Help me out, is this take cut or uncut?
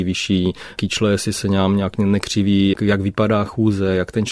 cut